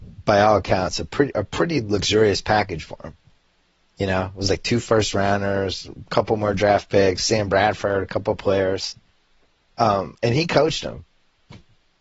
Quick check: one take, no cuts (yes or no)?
yes